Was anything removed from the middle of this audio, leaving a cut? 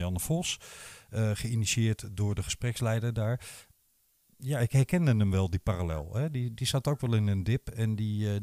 no; 0 cuts

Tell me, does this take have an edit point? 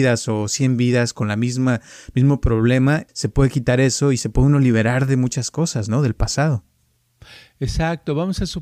yes; 1 cut; at 3.1 s

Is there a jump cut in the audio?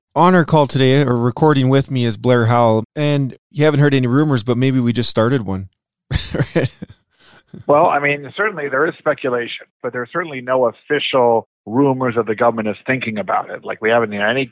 yes; 1 cut; at 2.8 s

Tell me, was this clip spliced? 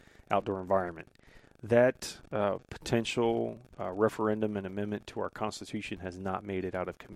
no; 0 cuts

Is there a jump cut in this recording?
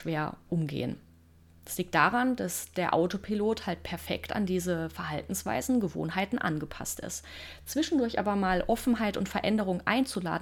no; 0 cuts

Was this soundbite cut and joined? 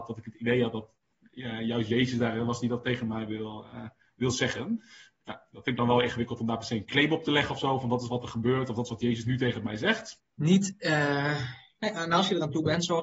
yes; 1 cut; at 10.2 s

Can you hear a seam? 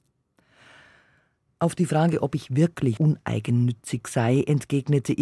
yes; 1 cut; at 3.0 s

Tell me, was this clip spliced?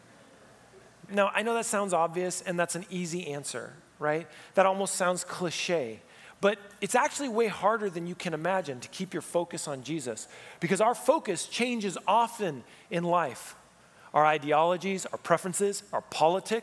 yes; 1 cut; at 1.1 s

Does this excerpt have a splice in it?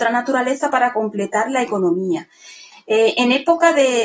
yes; 1 cut; at 2.7 s

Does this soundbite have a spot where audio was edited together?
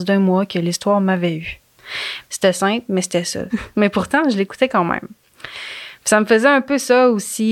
yes; 2 cuts; at 2.2 s, 3.5 s

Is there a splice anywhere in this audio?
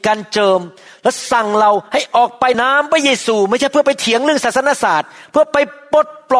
yes; 1 cut; at 2.5 s

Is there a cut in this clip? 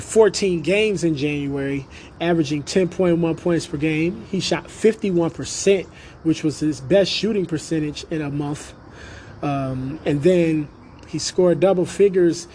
yes; 1 cut; at 2.1 s

